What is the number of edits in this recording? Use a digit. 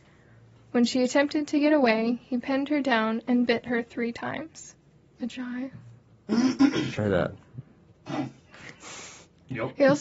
1